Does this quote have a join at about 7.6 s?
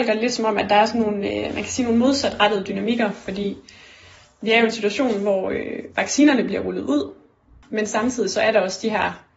yes; 1 cut; at 7.6 s

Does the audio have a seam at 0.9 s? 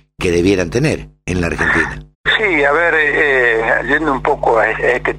no; 1 cut; at 2.1 s

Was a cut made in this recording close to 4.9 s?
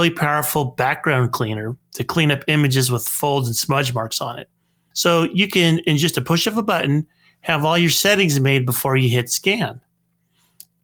yes; 1 cut; at 4.9 s

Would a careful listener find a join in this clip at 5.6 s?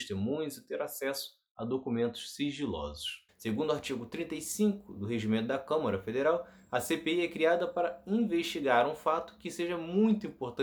no; 1 cut; at 3.3 s

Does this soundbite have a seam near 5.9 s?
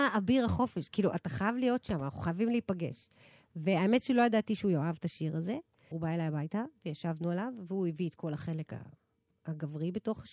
yes; 1 cut; at 5.9 s

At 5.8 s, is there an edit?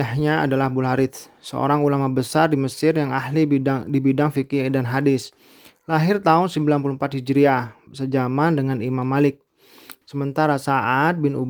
no; 2 cuts; at 7.9 s, 10.0 s

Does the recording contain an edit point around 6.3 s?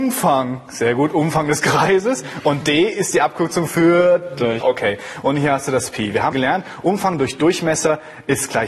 yes; 2 cuts; at 4.6 s, 6.3 s

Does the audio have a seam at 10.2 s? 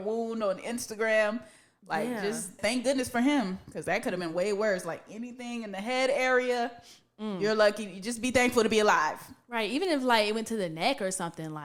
no; 1 cut; at 2.6 s

